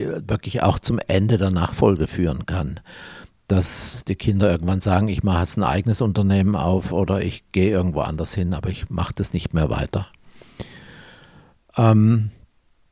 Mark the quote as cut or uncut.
uncut